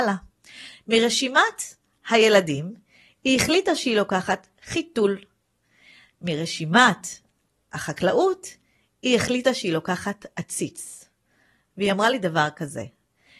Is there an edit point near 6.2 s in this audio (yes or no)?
no